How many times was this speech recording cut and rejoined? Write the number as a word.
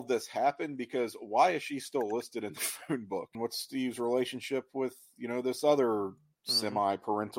one